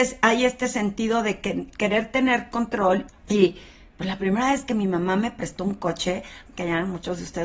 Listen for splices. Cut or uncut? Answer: cut